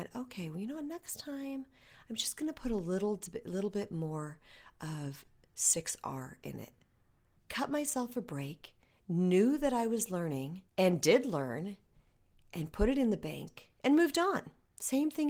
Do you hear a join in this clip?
yes; 2 cuts; at 7.4 s, 10.7 s

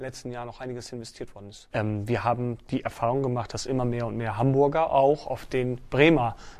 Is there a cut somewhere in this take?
yes; 1 cut; at 1.7 s

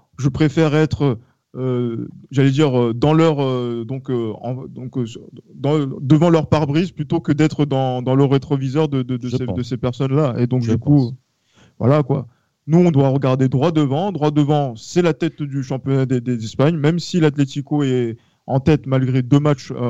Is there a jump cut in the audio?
no; 0 cuts

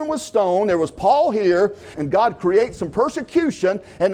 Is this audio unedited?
no; 1 cut; at 1.9 s

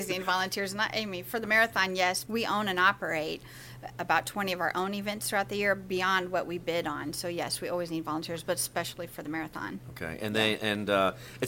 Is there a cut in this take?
yes; 1 cut; at 2.3 s

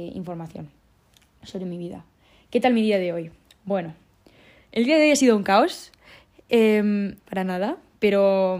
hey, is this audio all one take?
no; 1 cut; at 7.2 s

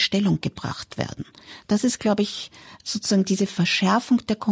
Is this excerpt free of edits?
yes; 0 cuts

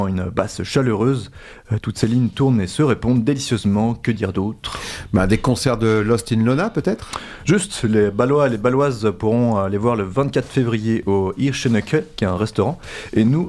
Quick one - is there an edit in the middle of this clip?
no; 0 cuts

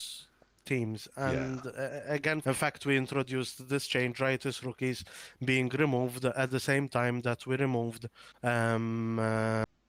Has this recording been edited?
yes; 1 cut; at 2.4 s

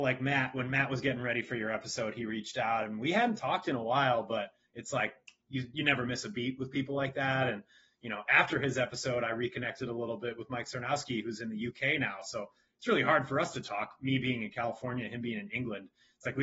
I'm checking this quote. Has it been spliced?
no; 0 cuts

